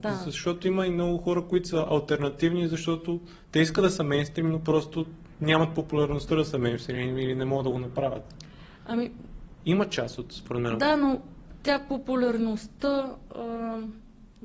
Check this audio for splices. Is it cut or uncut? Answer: uncut